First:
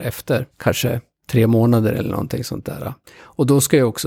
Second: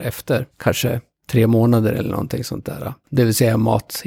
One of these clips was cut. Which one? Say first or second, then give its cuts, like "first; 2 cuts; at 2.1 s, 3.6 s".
second; 1 cut; at 3.1 s